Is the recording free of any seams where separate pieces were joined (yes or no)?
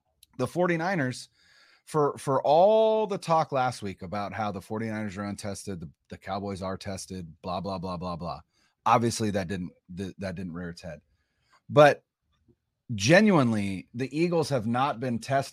yes